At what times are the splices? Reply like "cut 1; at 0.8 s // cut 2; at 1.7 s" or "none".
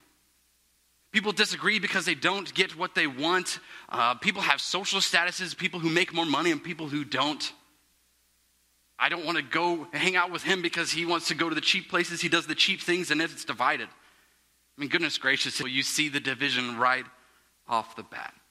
cut 1; at 15.6 s